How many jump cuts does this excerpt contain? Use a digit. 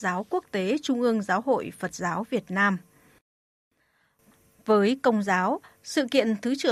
0